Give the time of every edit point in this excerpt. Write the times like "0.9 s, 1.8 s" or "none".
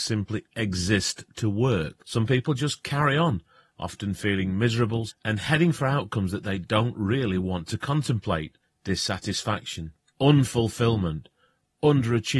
2.0 s, 5.1 s